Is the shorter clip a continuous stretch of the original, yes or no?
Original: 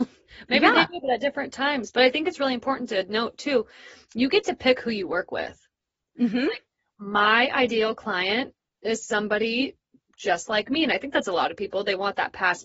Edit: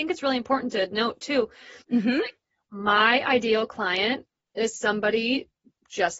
no